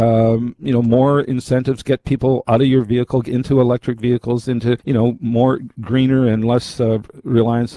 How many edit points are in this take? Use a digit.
1